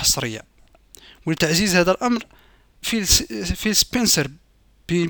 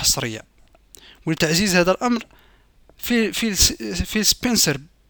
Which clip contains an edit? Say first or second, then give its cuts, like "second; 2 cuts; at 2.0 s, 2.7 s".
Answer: first; 1 cut; at 2.8 s